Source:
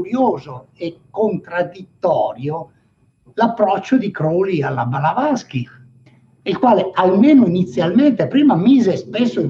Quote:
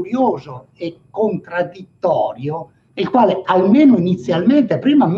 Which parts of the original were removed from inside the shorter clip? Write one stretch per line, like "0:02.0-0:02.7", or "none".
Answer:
0:02.9-0:06.4